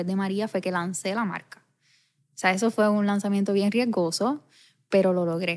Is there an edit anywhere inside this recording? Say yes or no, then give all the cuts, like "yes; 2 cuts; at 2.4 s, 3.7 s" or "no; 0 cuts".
no; 0 cuts